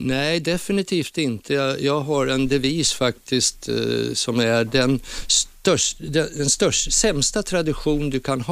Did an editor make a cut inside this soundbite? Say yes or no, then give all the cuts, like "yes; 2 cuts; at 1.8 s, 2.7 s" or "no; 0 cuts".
no; 0 cuts